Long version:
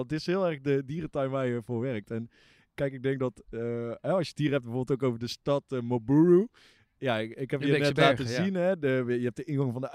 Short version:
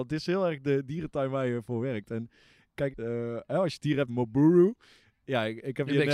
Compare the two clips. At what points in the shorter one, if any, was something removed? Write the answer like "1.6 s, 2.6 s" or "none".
2.9 s, 4.1 s